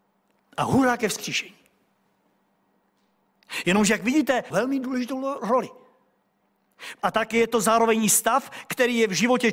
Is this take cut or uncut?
cut